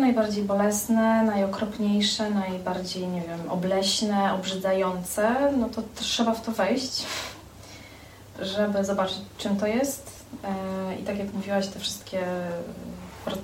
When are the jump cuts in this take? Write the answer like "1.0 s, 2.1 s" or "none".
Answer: none